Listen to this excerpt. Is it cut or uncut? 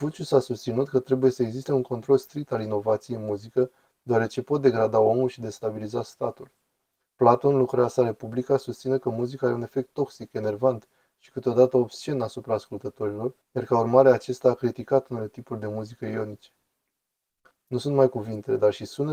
cut